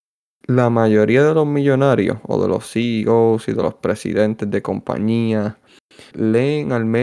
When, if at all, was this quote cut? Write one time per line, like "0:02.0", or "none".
0:06.1